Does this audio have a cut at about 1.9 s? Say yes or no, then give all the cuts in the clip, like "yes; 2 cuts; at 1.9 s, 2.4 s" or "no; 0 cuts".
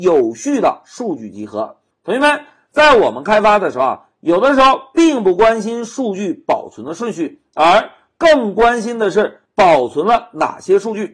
yes; 1 cut; at 1.9 s